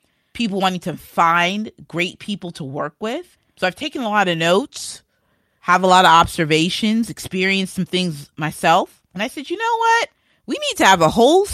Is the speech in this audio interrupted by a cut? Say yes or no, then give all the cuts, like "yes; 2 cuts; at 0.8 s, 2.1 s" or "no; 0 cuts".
no; 0 cuts